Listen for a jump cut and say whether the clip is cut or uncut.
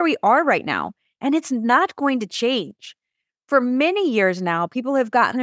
uncut